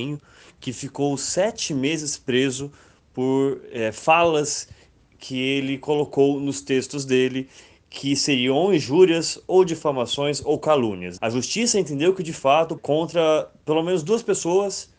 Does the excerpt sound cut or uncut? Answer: cut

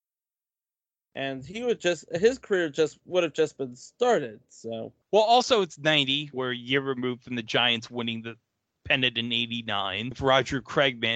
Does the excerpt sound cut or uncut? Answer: cut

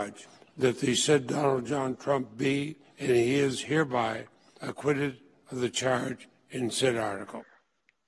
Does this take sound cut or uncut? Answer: uncut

